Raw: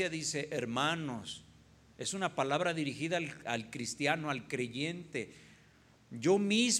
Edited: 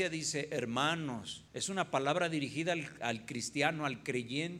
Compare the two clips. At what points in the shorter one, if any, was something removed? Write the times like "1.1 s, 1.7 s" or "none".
1.5 s

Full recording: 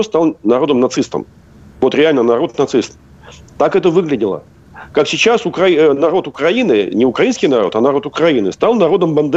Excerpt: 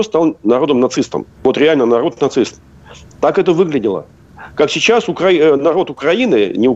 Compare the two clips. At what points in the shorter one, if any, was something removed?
1.3 s

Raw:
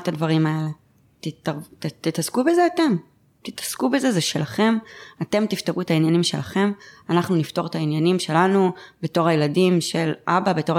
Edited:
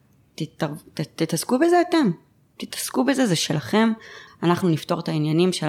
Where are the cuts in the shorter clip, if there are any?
4.3 s

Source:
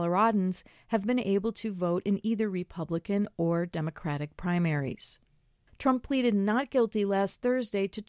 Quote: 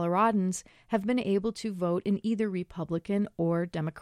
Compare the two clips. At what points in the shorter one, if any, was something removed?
none

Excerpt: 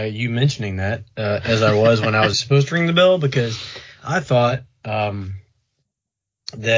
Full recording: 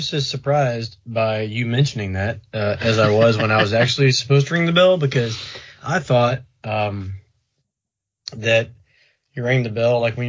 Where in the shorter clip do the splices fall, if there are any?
2.3 s

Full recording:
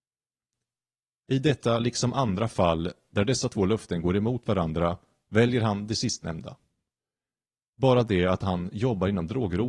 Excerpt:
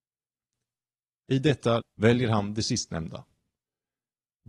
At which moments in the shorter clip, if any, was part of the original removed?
1.8 s

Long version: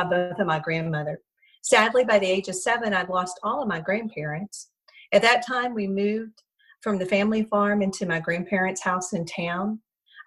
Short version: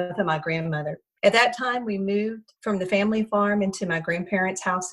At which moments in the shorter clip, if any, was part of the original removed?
1.2 s, 2.6 s

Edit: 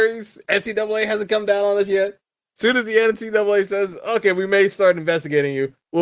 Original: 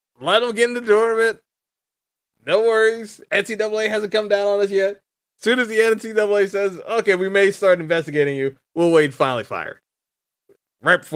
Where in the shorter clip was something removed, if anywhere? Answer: none

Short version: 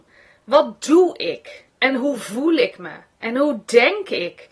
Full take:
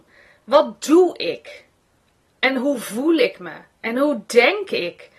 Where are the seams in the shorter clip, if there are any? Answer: 1.7 s

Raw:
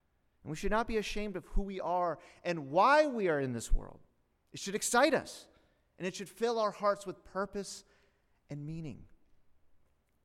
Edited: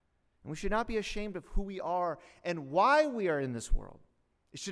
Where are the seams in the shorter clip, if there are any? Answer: none

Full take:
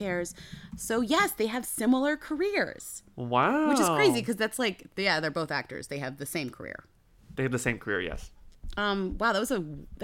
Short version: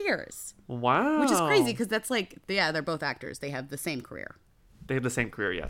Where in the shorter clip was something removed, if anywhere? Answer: none

